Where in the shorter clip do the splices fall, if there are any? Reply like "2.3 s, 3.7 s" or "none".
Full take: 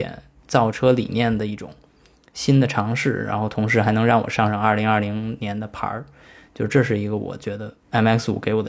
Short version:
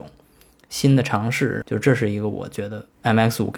1.6 s